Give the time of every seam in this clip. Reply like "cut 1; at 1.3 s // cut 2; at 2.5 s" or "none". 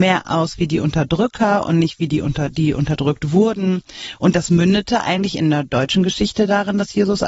none